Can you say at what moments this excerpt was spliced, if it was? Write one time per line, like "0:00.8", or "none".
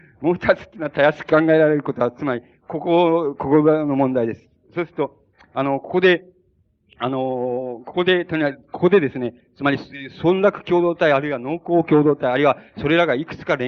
none